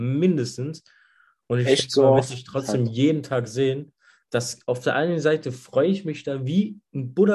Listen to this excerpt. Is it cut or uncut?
uncut